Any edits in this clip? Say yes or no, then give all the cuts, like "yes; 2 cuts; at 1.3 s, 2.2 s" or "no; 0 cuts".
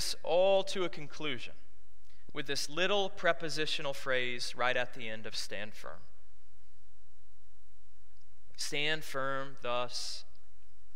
yes; 1 cut; at 2.3 s